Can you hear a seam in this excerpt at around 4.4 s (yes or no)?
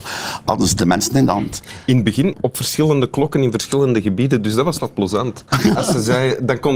no